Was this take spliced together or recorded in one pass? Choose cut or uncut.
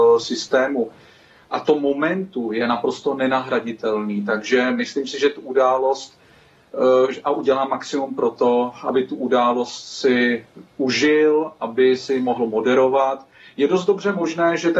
uncut